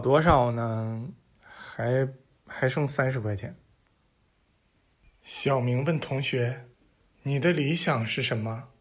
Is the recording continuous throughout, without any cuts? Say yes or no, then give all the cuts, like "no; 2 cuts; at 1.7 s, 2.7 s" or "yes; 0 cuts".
no; 2 cuts; at 4.3 s, 6.7 s